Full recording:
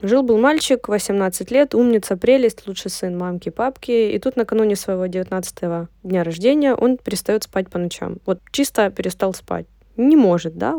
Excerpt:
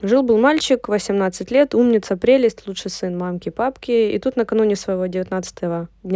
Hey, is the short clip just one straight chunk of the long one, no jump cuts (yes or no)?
yes